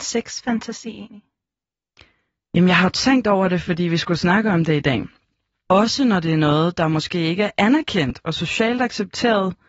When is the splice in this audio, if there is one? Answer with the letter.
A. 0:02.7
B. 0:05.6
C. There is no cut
B